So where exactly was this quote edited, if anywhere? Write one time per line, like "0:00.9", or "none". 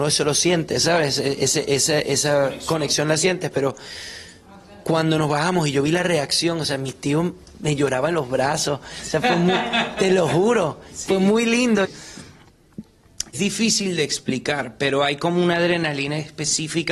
0:11.8
0:13.3

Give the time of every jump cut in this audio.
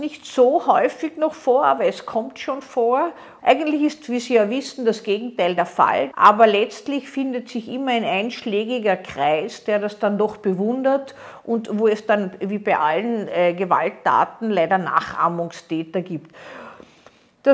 0:03.4
0:06.1

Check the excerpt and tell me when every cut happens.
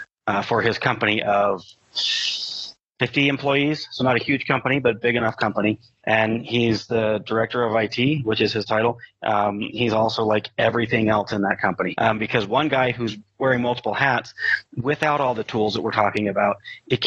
0:11.9

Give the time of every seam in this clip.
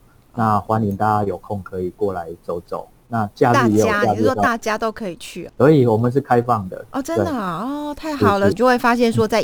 0:05.5
0:08.5

